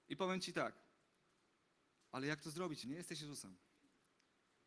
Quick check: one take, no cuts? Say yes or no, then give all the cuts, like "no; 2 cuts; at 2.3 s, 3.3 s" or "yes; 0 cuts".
no; 1 cut; at 2.8 s